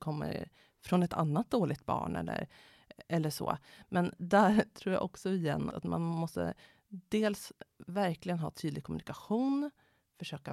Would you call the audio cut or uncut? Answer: cut